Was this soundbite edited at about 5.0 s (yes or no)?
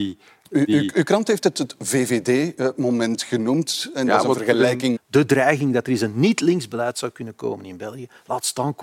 yes